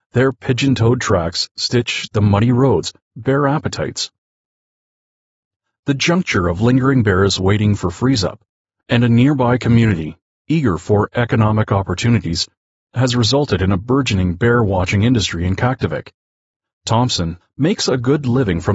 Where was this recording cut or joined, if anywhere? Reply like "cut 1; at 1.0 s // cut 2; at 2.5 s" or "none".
cut 1; at 3.0 s // cut 2; at 8.8 s // cut 3; at 17.4 s